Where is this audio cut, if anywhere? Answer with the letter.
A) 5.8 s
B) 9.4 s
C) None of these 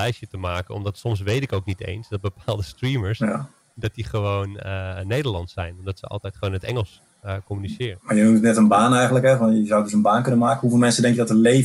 C